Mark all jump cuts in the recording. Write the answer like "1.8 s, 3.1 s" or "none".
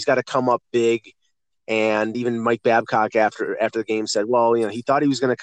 none